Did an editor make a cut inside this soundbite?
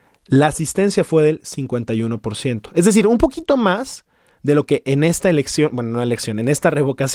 no; 0 cuts

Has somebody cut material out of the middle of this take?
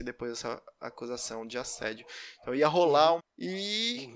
yes; 1 cut; at 3.2 s

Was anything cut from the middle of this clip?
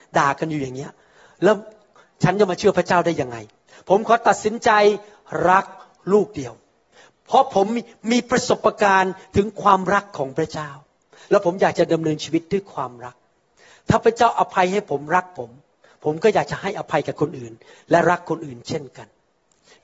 no; 0 cuts

